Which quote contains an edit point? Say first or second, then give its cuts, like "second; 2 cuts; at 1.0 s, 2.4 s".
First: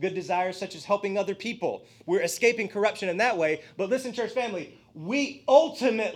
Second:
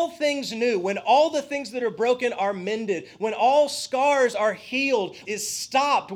second; 1 cut; at 5.2 s